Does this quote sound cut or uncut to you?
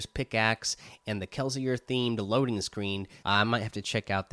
cut